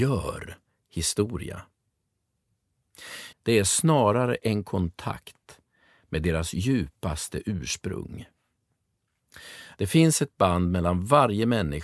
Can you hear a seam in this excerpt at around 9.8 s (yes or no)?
yes